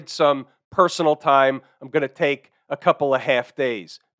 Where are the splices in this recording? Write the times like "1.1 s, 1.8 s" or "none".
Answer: none